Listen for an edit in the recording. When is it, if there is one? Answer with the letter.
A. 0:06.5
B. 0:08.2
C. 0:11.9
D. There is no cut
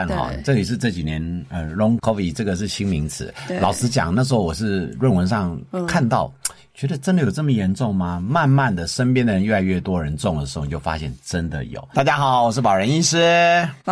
C